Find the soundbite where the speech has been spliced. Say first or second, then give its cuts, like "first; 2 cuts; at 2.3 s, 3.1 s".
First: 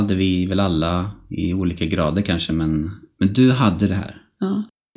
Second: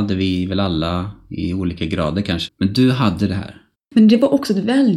second; 2 cuts; at 2.5 s, 3.7 s